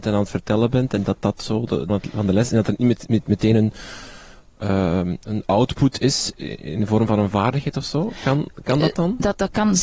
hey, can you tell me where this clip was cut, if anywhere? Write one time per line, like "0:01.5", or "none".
0:01.9